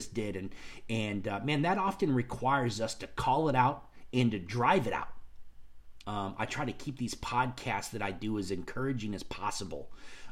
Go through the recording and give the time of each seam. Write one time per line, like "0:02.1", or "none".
0:06.0